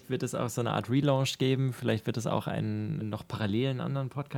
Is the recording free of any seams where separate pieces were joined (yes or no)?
no